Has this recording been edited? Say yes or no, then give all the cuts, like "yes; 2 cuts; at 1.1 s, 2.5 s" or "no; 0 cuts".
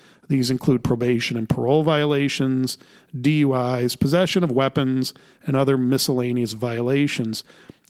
no; 0 cuts